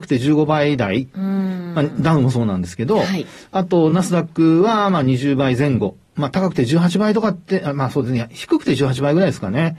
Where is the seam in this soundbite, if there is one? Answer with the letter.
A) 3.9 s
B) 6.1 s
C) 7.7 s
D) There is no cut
D